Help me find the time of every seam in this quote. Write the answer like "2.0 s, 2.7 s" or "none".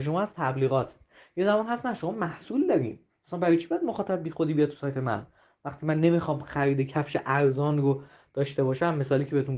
none

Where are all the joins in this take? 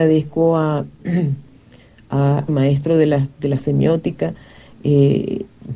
2.5 s

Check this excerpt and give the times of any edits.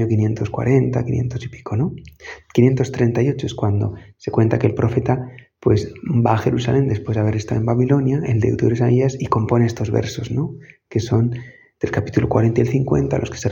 none

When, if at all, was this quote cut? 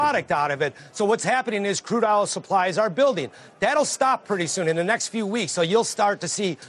none

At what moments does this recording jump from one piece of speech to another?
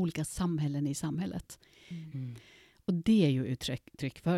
2.1 s

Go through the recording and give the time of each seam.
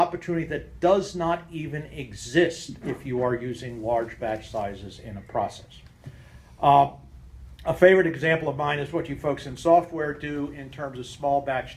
none

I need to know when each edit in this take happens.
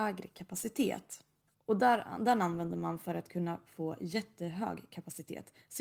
1.5 s

